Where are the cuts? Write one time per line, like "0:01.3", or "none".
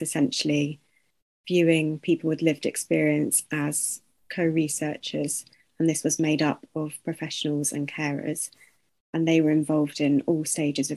0:05.6